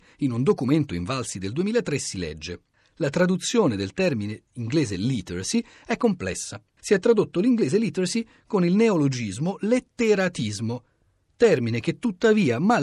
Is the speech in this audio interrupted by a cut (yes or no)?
no